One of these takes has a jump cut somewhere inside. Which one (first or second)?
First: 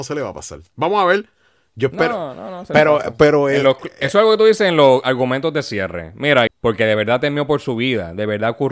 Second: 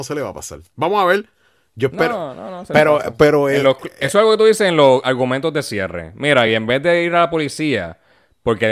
first